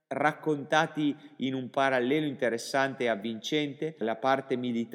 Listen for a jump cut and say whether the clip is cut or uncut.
cut